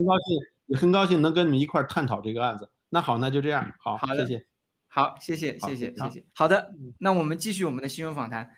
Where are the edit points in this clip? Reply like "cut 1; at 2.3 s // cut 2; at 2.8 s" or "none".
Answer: cut 1; at 6.3 s